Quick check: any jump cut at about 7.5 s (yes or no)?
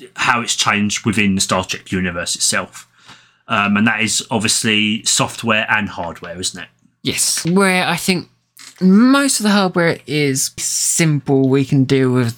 yes